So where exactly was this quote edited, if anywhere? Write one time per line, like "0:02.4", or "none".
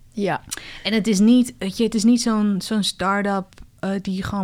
none

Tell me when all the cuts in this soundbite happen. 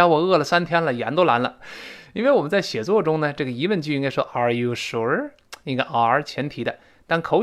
0:01.6

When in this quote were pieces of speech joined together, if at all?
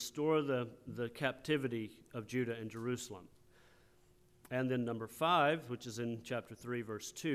none

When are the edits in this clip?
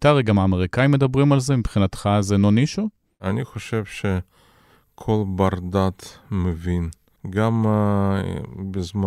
0:07.2

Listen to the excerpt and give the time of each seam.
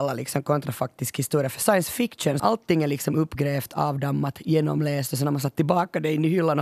0:02.4

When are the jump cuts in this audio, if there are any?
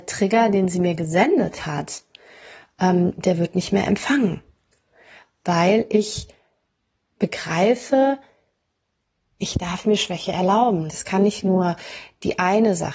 0:10.9

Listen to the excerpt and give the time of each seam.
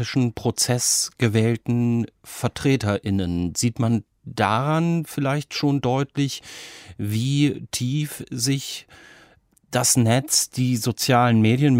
none

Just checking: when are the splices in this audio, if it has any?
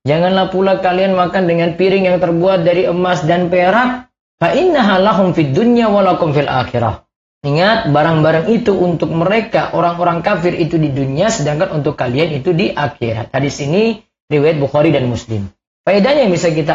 none

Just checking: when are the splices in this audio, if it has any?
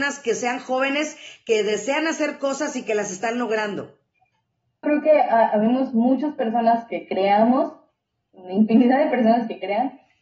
0:04.8

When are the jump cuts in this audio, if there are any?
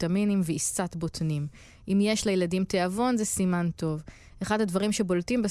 none

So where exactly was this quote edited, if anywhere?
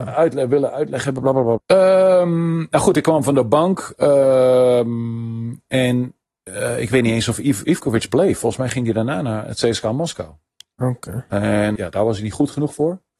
0:01.6
0:11.8

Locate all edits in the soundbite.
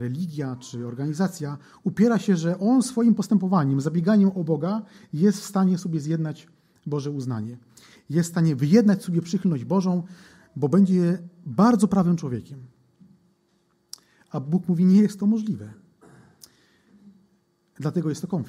none

